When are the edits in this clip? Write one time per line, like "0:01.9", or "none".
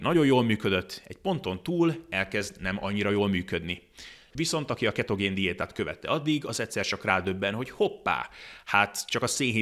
0:04.3